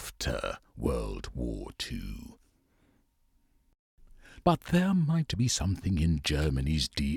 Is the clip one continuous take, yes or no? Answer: no